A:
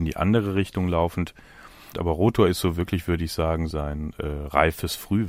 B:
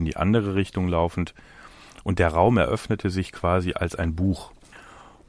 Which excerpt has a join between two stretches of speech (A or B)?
A